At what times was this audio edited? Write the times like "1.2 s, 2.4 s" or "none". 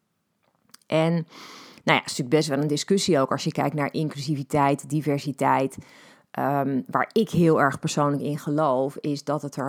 none